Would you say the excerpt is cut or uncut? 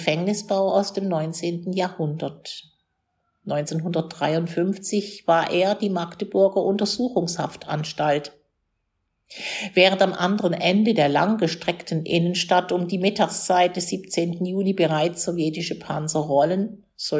uncut